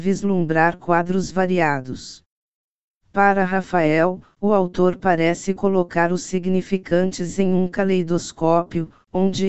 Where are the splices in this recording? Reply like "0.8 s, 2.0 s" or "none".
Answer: 3.0 s